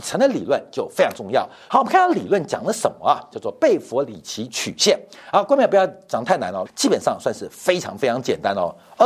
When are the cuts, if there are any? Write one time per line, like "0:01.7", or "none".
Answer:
0:01.7
0:06.7

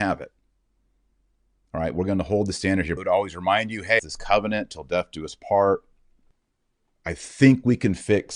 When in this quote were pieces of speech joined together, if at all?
0:03.0
0:04.0

